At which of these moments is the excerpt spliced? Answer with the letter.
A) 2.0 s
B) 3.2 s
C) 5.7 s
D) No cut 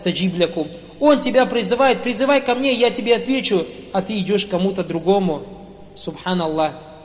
D